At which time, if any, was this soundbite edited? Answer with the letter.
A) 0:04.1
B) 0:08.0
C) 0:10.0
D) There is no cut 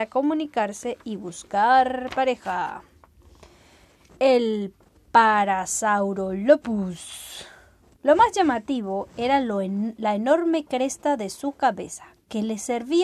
B